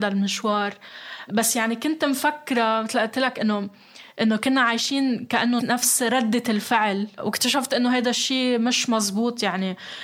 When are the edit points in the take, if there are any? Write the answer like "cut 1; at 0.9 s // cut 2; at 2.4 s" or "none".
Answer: cut 1; at 5.6 s